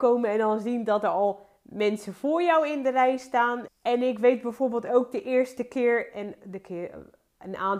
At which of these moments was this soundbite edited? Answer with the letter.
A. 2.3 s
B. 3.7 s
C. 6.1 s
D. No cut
B